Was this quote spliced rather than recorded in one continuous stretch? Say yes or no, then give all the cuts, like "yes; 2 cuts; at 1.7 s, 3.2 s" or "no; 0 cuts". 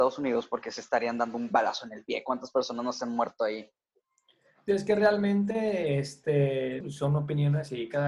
yes; 1 cut; at 6.8 s